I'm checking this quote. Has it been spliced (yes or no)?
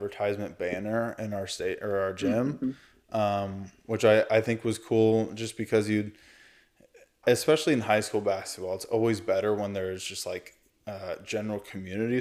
yes